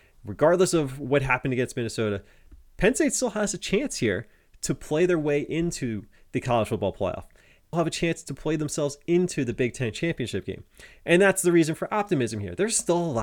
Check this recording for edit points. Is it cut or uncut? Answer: cut